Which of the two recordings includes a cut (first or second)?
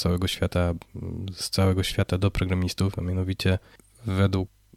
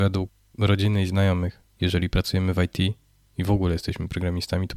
second